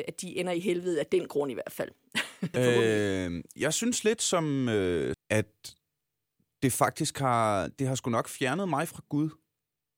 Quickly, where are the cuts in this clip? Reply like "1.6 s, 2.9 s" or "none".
2.5 s, 5.1 s